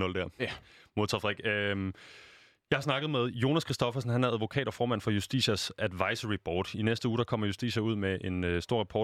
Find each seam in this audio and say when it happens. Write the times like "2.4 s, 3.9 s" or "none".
none